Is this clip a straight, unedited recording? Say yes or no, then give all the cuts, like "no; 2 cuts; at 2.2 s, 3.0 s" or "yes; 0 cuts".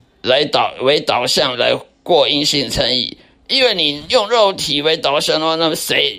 no; 1 cut; at 1.5 s